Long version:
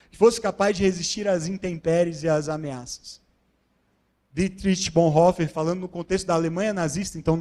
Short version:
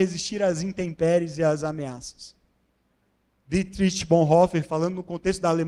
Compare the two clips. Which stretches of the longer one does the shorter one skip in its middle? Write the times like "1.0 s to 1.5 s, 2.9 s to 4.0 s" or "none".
none